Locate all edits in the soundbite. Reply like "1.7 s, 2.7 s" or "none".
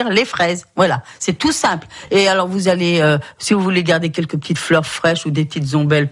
none